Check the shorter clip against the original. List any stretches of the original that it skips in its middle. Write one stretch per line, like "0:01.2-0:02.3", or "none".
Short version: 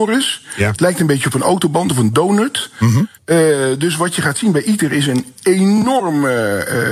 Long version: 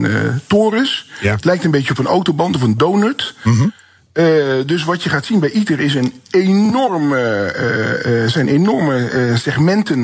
0:03.8-0:04.0